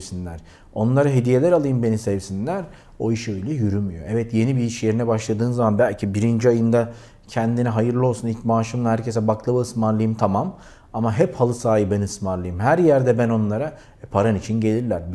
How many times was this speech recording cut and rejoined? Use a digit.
0